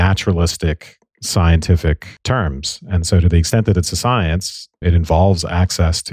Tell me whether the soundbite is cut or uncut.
uncut